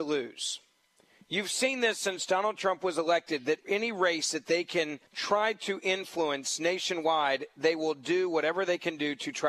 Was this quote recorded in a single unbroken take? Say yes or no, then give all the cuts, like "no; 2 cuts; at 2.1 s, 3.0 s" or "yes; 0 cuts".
no; 2 cuts; at 3.6 s, 5.1 s